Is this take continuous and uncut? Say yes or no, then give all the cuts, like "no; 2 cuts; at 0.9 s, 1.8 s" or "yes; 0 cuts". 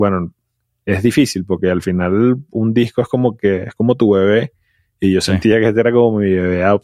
yes; 0 cuts